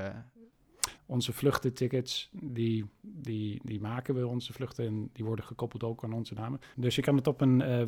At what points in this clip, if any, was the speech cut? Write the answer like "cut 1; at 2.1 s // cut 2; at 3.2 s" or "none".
cut 1; at 1.0 s // cut 2; at 6.7 s